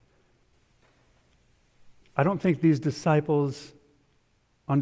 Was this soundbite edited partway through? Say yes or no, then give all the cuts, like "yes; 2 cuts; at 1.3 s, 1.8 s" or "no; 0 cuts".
yes; 1 cut; at 2.0 s